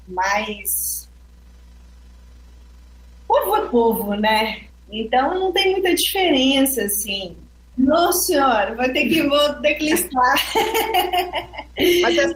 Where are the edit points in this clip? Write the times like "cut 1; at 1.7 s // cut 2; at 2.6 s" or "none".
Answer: cut 1; at 4.7 s // cut 2; at 7.7 s